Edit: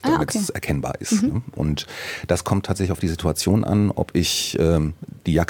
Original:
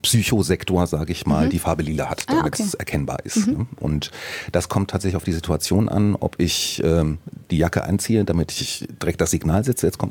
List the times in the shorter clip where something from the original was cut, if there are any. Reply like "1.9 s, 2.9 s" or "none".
none

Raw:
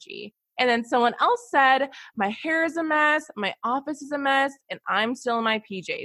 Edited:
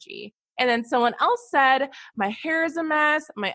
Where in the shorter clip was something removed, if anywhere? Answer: none

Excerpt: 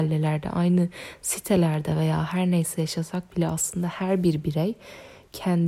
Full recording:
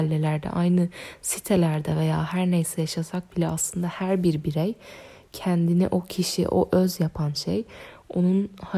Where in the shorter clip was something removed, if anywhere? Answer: none

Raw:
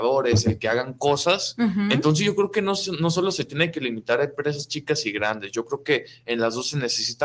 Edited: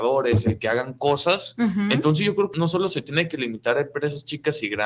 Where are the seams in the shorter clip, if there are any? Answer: 2.5 s

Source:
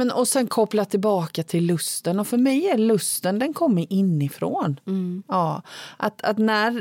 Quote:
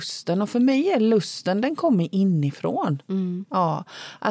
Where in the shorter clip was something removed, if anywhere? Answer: none

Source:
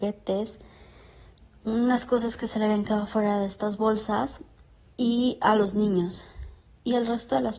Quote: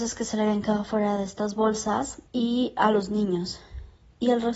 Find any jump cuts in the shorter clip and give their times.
2.3 s

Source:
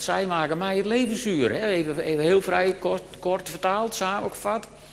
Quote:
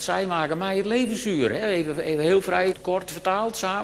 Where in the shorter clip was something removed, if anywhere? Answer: 2.7 s

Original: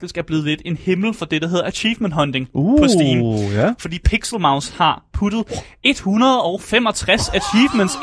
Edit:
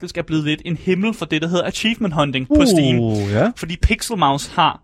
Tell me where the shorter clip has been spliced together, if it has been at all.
2.5 s

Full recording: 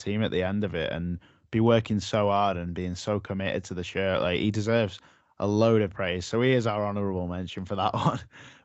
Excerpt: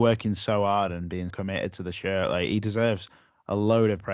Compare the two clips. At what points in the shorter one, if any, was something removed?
1.3 s

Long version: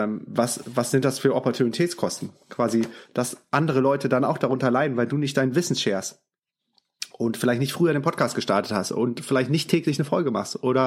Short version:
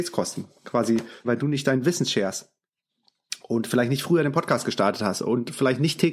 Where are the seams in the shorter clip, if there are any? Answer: 1.2 s

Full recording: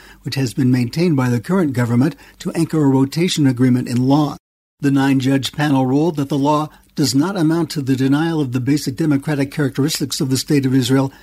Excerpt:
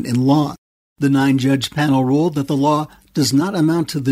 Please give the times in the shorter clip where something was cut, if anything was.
none

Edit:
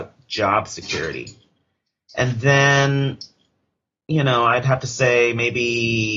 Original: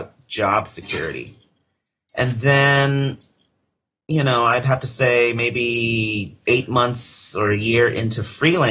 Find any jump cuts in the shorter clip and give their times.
none

